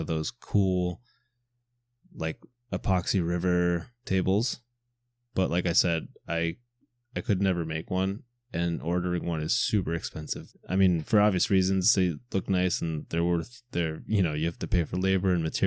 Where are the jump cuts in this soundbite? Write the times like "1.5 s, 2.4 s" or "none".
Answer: 10.5 s